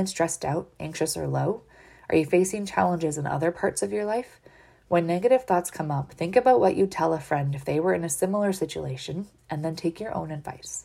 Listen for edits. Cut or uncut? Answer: uncut